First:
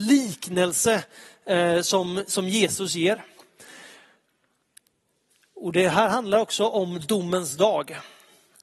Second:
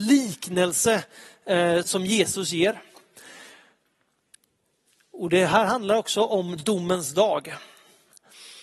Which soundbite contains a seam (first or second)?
second